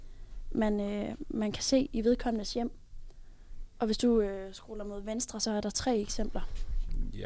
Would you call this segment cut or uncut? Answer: uncut